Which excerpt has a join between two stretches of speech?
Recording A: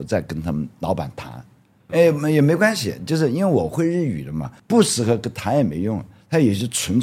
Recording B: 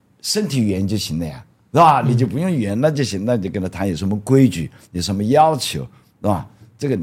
A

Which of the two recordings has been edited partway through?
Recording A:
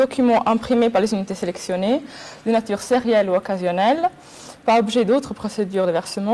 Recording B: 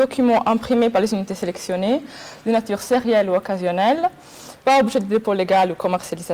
A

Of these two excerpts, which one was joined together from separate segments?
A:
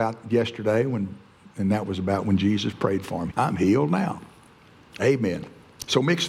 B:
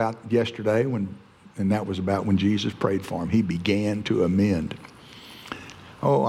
A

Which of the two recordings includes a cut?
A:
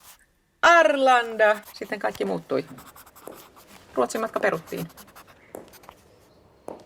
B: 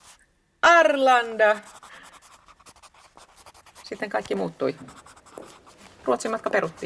A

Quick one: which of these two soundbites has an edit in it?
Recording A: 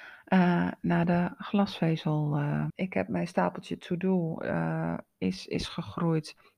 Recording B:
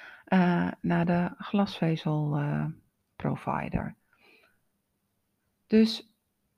A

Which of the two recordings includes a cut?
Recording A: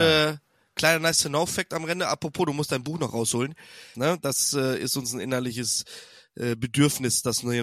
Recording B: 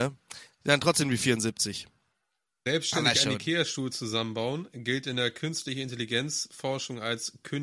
A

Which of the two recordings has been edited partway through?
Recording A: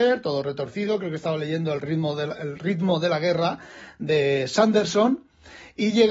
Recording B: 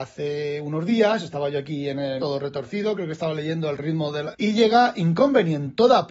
B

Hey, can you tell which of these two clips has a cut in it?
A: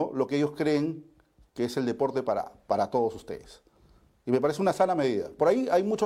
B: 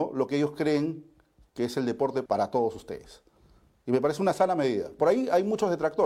B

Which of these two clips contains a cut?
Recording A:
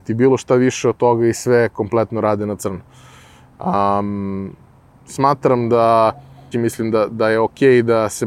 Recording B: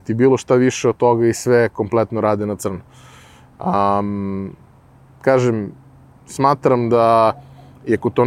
A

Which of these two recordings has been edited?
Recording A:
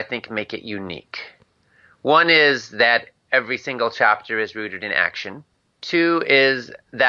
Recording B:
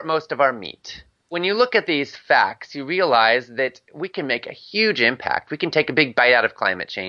B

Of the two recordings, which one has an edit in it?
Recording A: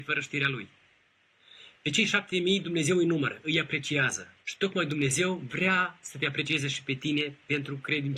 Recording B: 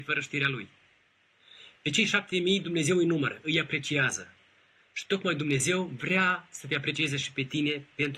A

